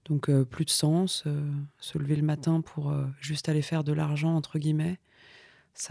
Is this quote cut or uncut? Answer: uncut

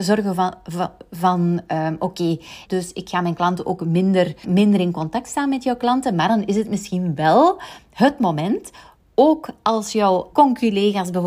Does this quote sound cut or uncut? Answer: cut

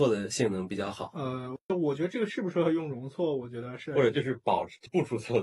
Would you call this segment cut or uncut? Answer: uncut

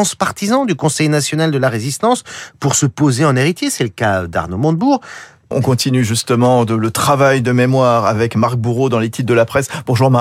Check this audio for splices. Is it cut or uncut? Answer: cut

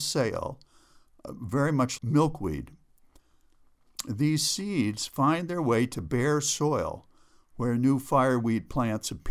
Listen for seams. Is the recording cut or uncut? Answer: cut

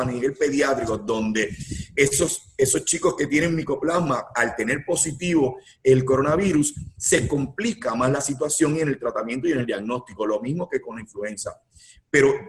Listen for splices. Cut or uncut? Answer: uncut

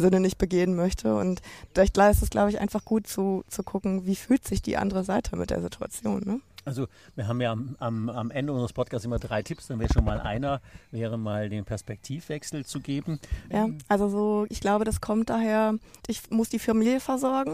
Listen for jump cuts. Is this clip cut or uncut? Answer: cut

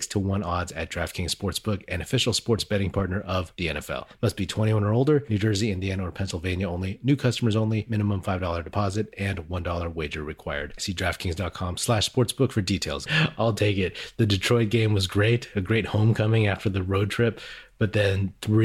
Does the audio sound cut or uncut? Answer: cut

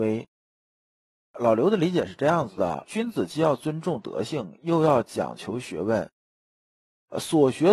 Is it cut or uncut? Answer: cut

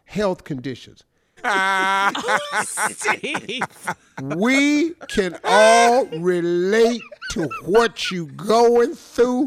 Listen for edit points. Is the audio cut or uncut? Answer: cut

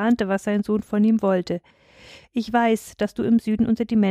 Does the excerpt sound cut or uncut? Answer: uncut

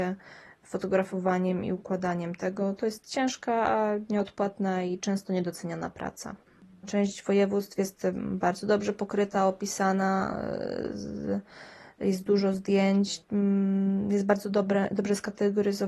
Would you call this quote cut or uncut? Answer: cut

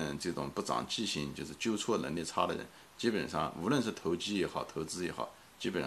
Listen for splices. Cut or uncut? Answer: uncut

